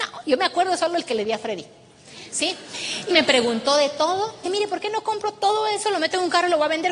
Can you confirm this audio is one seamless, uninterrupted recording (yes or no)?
no